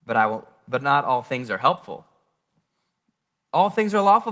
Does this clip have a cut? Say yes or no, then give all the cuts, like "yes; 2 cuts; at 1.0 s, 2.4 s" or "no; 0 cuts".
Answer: no; 0 cuts